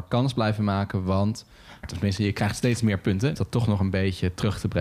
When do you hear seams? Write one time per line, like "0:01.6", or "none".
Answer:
0:01.8
0:03.3